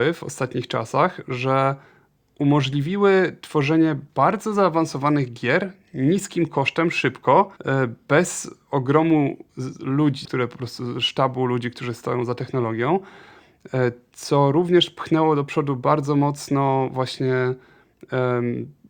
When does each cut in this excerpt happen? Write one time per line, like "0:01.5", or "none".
0:07.6
0:10.2